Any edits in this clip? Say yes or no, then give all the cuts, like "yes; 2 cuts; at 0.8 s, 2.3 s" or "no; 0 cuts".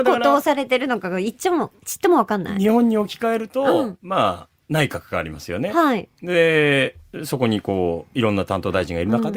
no; 0 cuts